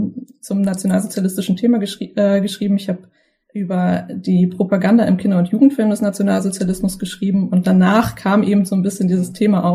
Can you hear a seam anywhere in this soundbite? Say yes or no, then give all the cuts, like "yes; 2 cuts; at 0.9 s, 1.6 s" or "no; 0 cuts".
no; 0 cuts